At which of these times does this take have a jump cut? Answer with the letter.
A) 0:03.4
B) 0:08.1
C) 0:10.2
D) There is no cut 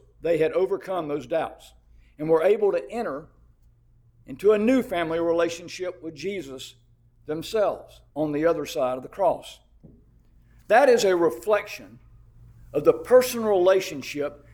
B